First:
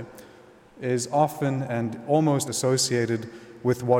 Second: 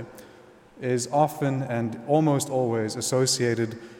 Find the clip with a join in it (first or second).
first